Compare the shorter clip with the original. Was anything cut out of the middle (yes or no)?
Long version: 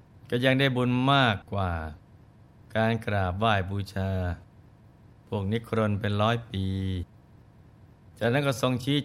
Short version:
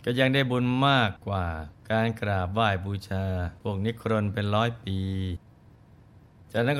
yes